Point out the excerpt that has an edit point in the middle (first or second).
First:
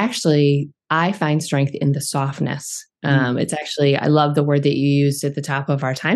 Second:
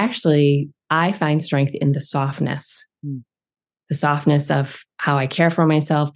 first